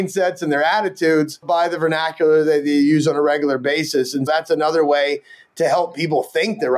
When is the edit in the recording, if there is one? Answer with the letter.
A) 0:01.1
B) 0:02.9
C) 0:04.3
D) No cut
C